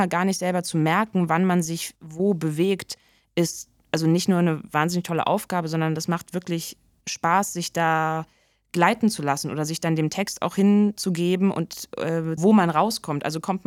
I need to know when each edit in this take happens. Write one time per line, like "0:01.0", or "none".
0:12.4